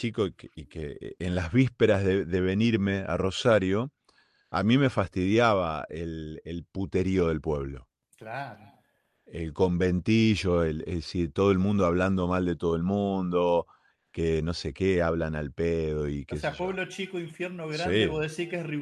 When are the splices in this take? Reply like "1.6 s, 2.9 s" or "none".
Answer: none